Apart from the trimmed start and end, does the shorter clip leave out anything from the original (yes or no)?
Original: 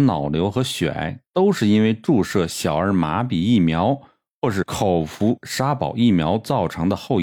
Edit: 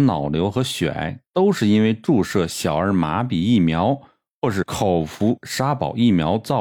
no